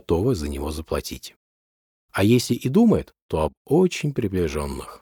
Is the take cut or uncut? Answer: cut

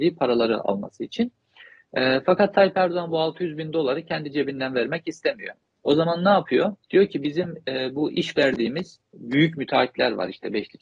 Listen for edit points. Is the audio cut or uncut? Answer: cut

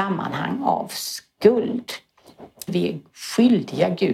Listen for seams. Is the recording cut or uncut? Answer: uncut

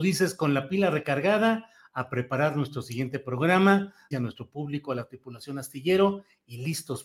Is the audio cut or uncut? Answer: cut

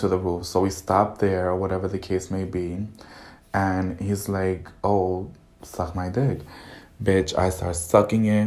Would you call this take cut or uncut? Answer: uncut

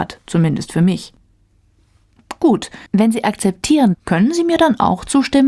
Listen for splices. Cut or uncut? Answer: cut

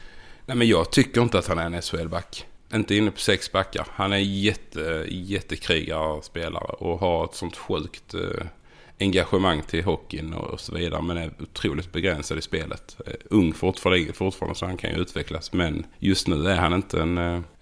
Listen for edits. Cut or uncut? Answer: cut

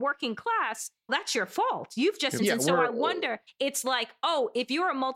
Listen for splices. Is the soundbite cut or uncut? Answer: cut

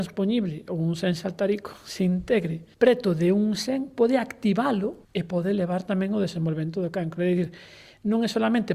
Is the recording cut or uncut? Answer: cut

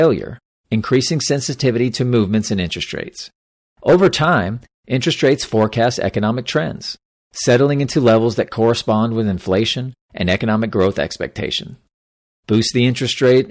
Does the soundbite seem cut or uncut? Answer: cut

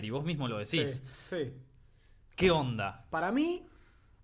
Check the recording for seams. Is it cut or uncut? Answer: uncut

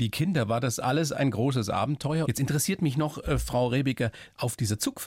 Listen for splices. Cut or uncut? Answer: cut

